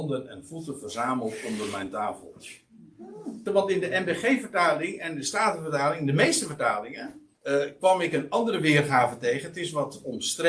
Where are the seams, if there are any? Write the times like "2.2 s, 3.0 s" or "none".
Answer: 3.5 s, 7.3 s